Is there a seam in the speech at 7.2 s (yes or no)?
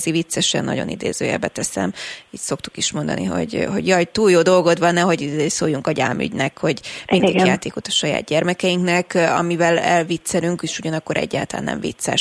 yes